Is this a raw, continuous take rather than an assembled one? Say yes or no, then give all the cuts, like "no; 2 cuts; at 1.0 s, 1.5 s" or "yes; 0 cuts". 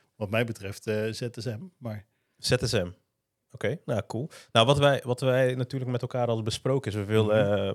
yes; 0 cuts